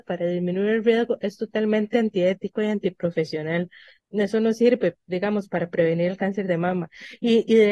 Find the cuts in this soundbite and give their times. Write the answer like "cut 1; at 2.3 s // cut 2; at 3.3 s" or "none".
cut 1; at 4.0 s

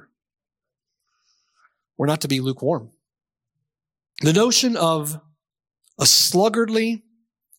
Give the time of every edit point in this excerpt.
cut 1; at 4.2 s

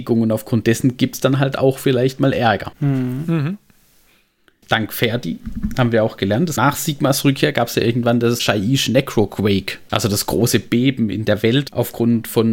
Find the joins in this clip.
none

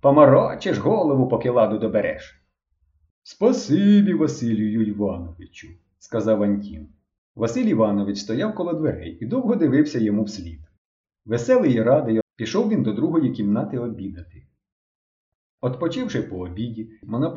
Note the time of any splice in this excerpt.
cut 1; at 7.2 s // cut 2; at 11.0 s // cut 3; at 12.2 s

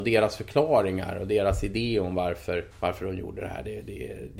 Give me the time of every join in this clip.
cut 1; at 2.7 s

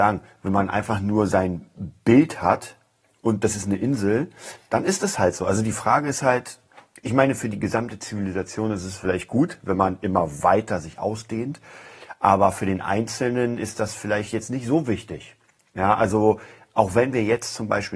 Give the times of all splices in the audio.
none

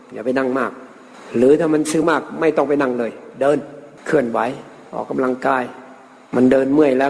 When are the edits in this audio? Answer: cut 1; at 2.0 s // cut 2; at 4.0 s

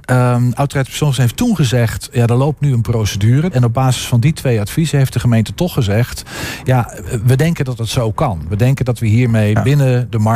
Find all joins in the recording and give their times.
cut 1; at 3.5 s

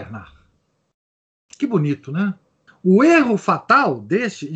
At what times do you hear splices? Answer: cut 1; at 2.7 s

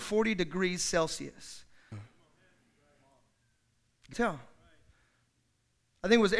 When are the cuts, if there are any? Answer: cut 1; at 1.9 s // cut 2; at 4.1 s

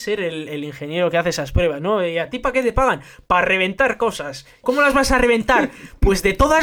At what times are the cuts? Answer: cut 1; at 4.6 s

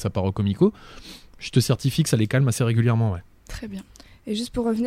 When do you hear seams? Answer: none

